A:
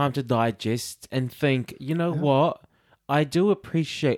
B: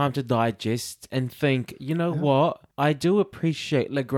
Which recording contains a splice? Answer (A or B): B